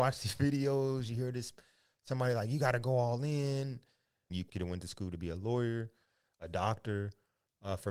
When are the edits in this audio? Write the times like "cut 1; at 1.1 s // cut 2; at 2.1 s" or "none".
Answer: cut 1; at 4.3 s

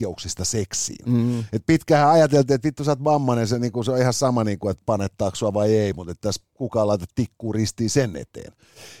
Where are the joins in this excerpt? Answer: none

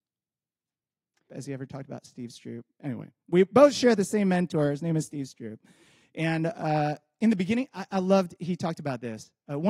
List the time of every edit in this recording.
cut 1; at 1.3 s

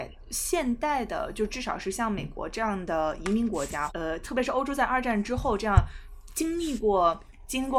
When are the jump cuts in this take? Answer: cut 1; at 3.9 s

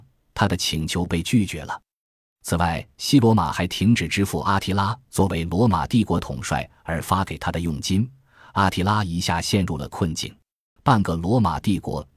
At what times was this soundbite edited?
cut 1; at 10.8 s

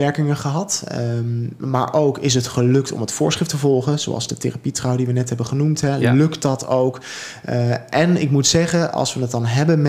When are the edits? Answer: none

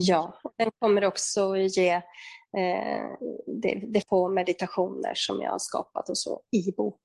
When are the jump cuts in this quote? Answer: cut 1; at 4.0 s

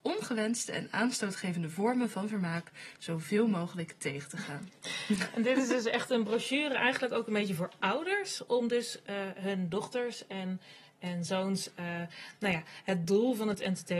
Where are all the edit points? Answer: none

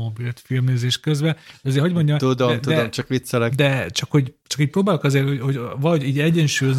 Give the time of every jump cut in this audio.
none

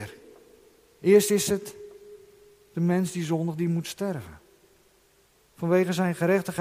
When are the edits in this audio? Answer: cut 1; at 5.4 s

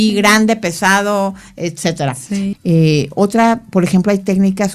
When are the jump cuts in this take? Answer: cut 1; at 2.5 s

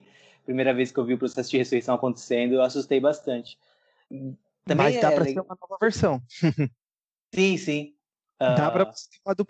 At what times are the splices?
none

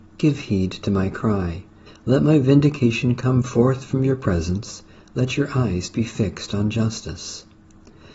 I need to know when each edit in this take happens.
cut 1; at 1.9 s

